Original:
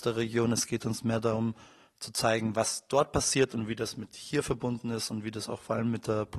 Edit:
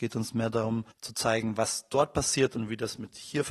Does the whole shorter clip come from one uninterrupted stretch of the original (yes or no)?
no